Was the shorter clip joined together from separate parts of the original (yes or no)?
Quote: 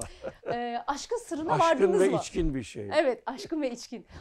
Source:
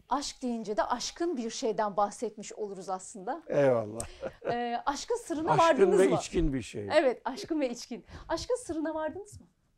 no